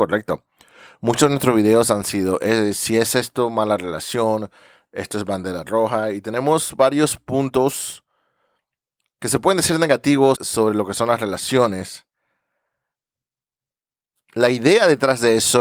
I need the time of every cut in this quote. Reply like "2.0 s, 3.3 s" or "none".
10.3 s